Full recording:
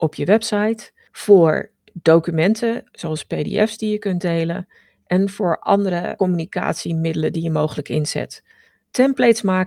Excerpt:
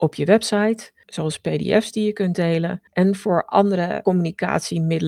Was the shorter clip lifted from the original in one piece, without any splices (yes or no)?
no